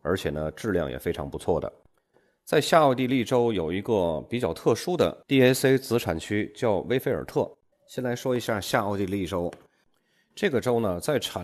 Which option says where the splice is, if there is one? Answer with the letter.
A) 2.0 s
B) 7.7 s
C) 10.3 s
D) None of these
B